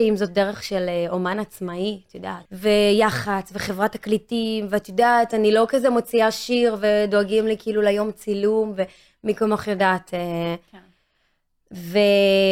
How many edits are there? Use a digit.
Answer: 1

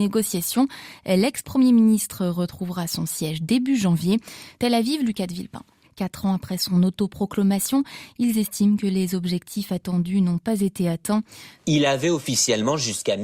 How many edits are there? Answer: 3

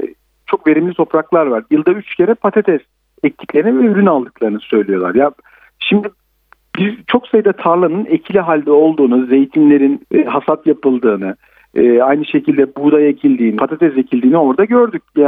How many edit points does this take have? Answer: 2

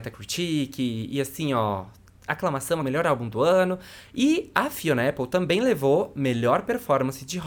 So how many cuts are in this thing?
1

